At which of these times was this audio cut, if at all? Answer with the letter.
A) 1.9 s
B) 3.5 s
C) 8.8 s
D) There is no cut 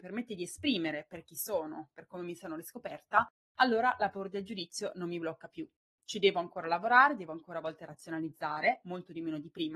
D